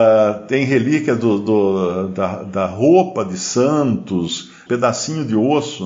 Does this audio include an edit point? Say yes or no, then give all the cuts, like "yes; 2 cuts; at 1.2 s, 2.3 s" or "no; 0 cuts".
yes; 1 cut; at 4.7 s